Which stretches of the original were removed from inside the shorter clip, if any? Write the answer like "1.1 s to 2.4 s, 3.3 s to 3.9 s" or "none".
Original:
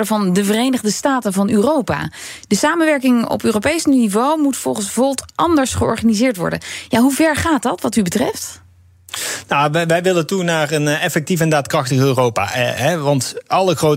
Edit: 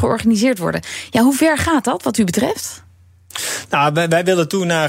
none